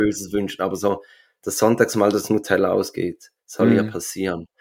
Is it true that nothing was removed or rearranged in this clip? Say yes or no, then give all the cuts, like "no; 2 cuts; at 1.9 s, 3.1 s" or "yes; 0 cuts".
no; 1 cut; at 3.4 s